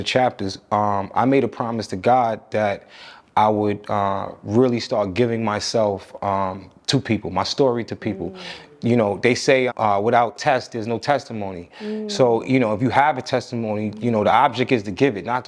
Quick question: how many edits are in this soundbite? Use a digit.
1